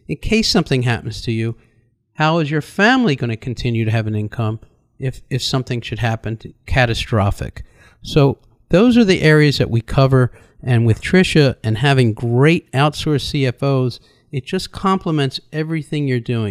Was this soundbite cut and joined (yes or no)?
no